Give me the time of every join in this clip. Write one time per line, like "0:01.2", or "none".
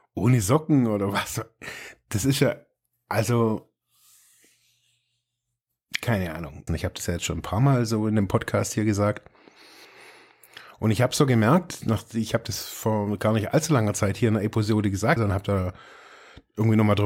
0:06.7
0:15.2